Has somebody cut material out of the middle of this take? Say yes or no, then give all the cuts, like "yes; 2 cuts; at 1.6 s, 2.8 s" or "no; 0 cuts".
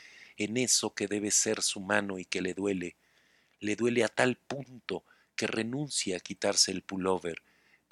no; 0 cuts